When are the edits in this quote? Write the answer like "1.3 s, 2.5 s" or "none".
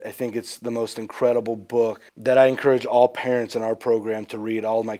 2.1 s